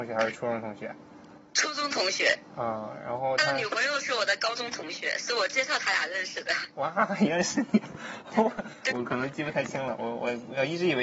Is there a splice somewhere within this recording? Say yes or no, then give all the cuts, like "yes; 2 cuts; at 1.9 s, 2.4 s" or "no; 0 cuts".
yes; 1 cut; at 8.9 s